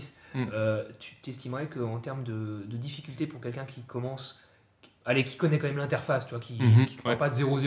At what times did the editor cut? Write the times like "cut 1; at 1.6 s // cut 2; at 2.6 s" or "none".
none